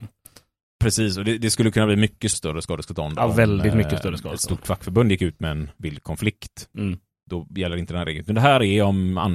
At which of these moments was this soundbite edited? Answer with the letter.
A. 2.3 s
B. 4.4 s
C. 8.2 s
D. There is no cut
A